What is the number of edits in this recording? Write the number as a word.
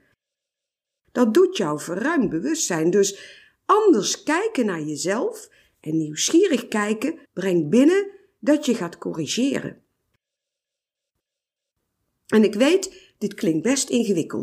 one